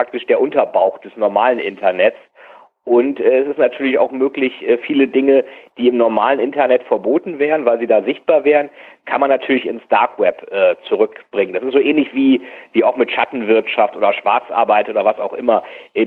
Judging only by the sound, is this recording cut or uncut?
uncut